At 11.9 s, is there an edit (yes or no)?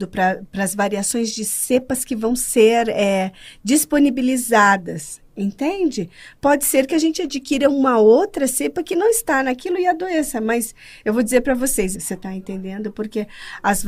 yes